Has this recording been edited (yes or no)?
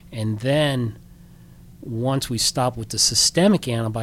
no